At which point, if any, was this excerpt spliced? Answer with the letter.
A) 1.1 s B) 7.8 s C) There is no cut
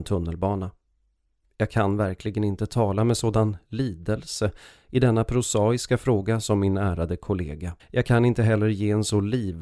B